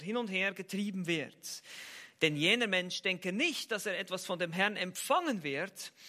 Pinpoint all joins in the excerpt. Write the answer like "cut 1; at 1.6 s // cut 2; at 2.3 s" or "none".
none